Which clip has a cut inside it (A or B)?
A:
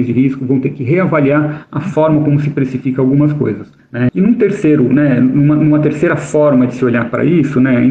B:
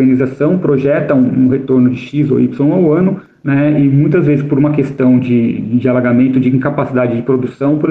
A